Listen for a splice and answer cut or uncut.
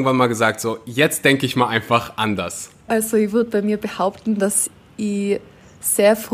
cut